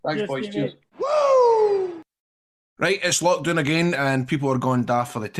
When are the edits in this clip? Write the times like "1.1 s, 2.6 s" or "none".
none